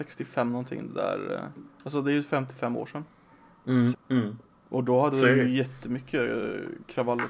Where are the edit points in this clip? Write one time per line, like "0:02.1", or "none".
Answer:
0:03.9